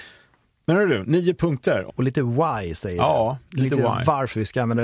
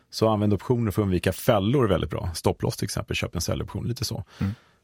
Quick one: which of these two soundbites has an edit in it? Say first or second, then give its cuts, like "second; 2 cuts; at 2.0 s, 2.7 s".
first; 1 cut; at 1.9 s